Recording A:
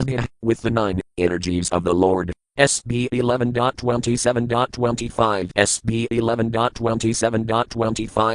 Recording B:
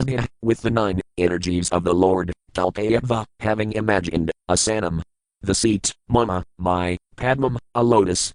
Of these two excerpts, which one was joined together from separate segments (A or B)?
A